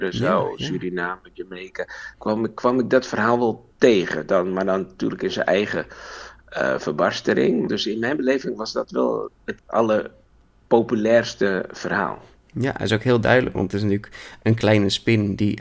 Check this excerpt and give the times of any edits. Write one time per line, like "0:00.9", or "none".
0:07.7